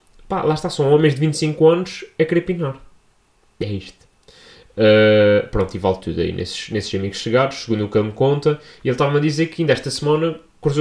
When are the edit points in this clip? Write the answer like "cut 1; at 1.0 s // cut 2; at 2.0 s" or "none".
none